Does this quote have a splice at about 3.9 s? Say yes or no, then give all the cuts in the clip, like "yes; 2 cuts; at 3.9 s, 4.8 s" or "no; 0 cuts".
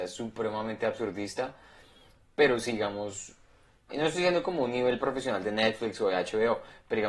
yes; 1 cut; at 3.9 s